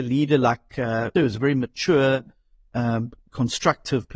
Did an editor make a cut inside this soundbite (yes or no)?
yes